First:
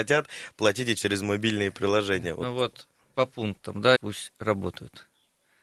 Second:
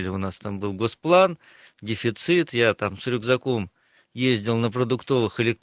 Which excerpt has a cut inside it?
first; 1 cut; at 4.0 s

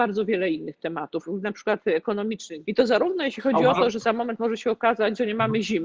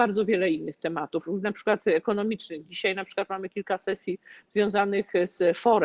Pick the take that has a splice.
first; 1 cut; at 2.6 s

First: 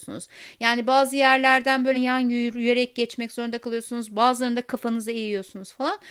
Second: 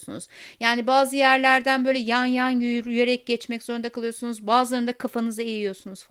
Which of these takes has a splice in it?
first; 1 cut; at 1.9 s

